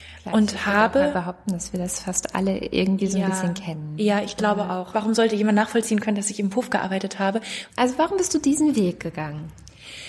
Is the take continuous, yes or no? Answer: no